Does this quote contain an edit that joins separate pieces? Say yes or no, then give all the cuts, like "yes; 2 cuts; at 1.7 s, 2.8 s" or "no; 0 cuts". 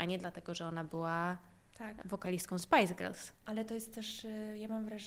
no; 0 cuts